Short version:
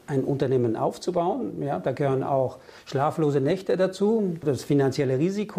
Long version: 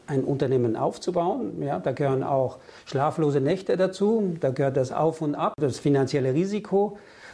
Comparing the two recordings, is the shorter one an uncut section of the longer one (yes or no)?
no